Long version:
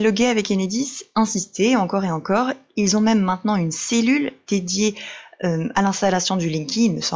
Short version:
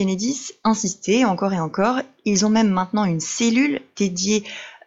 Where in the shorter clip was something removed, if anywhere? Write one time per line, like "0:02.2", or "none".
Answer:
none